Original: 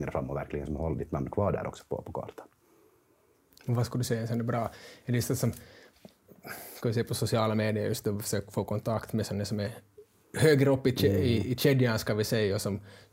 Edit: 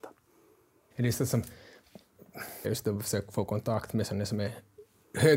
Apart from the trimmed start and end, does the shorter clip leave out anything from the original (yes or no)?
yes